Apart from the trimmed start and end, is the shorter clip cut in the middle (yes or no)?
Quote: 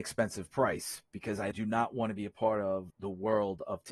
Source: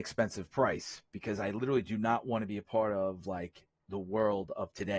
yes